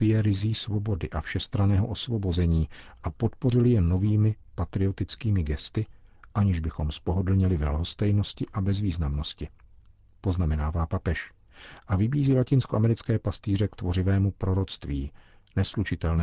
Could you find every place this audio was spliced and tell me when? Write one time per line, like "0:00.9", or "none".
none